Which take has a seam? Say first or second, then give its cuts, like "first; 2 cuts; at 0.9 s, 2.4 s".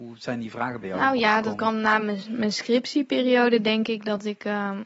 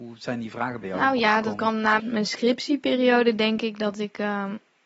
second; 1 cut; at 2.0 s